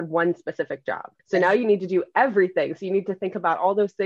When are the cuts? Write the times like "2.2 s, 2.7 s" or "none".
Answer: 1.2 s